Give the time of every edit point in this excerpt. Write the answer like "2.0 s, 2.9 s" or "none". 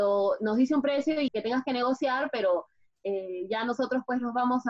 1.3 s